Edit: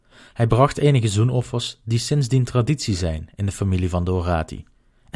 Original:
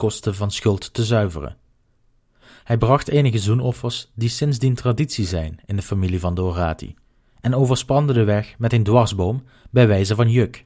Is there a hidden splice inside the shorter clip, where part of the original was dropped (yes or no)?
no